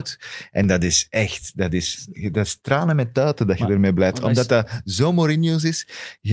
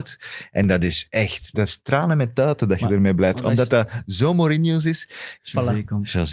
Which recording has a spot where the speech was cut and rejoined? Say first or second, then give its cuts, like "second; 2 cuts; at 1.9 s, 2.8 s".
second; 2 cuts; at 1.5 s, 5.4 s